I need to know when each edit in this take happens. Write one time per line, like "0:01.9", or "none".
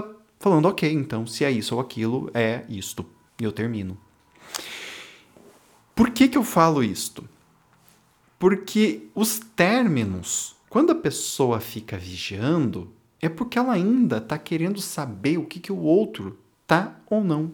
0:10.6